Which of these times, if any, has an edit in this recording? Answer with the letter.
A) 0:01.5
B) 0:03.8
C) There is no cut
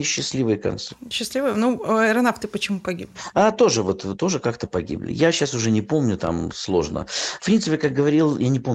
C